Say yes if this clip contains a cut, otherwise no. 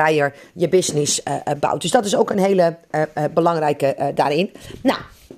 no